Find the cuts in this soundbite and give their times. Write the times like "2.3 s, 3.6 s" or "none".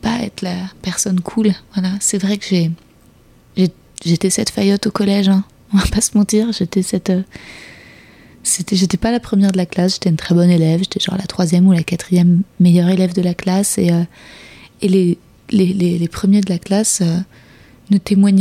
none